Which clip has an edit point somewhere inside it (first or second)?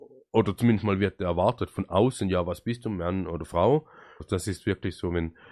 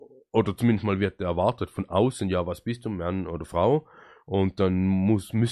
first